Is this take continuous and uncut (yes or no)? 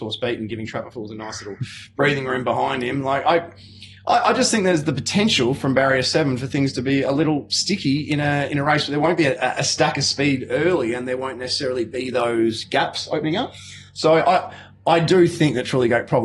yes